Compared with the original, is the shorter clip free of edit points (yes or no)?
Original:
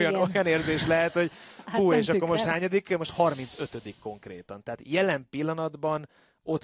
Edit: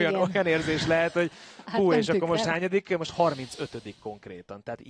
yes